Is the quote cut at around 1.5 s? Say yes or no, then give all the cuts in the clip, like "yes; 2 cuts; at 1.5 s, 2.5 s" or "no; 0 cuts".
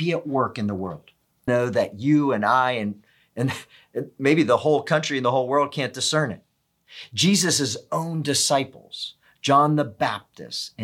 yes; 1 cut; at 1.5 s